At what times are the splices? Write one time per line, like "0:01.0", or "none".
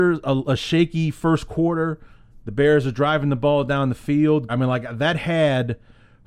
0:04.5